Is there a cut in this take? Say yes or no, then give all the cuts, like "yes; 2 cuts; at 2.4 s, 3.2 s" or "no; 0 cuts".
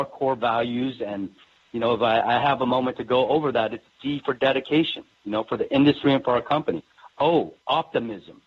no; 0 cuts